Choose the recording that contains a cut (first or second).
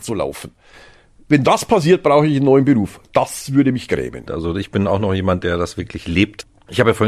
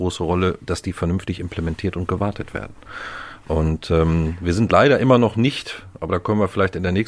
first